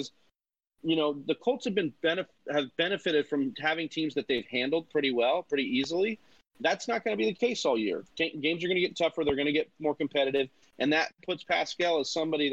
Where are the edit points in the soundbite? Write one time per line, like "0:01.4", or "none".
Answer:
0:10.6